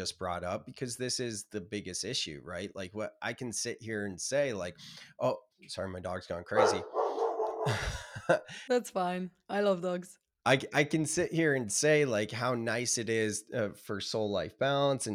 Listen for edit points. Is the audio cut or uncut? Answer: uncut